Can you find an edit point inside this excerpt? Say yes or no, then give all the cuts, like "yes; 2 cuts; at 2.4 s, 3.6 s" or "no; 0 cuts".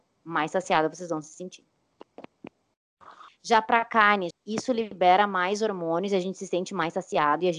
yes; 2 cuts; at 3.3 s, 4.3 s